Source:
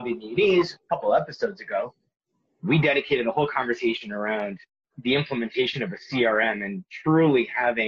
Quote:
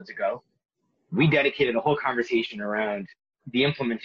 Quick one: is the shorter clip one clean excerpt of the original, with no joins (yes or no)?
yes